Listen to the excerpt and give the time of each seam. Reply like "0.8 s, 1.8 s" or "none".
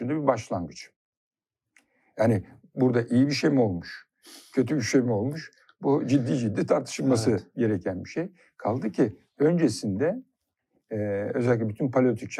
none